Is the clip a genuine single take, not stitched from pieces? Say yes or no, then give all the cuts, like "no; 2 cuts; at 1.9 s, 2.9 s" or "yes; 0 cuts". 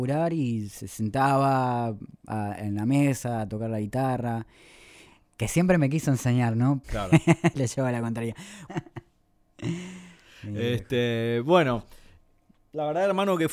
no; 2 cuts; at 6.8 s, 8.7 s